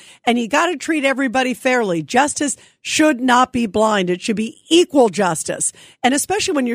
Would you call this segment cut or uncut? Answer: uncut